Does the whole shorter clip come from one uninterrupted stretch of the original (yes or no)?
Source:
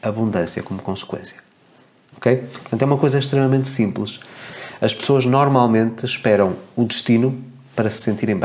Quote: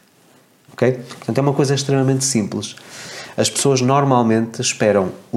yes